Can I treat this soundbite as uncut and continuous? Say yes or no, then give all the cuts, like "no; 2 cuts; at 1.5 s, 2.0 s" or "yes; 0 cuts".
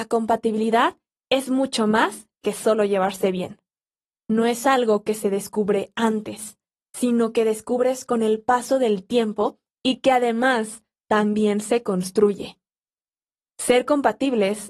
yes; 0 cuts